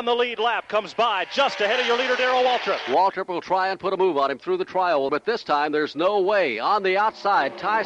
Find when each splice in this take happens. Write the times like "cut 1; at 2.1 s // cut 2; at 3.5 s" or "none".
cut 1; at 5.1 s